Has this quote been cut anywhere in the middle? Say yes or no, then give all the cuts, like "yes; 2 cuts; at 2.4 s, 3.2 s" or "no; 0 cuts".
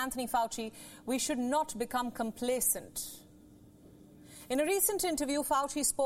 no; 0 cuts